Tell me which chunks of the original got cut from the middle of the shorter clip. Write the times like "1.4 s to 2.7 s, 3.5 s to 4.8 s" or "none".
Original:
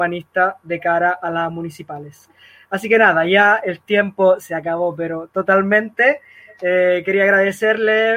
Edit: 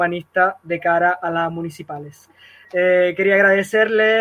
2.6 s to 6.5 s